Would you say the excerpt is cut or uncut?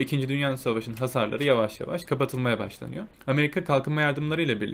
uncut